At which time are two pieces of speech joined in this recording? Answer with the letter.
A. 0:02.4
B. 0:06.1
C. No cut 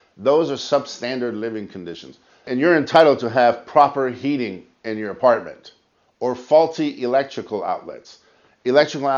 A